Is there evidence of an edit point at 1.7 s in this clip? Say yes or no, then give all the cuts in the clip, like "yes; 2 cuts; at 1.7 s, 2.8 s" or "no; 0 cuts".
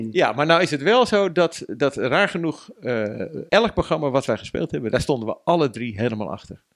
no; 1 cut; at 3.5 s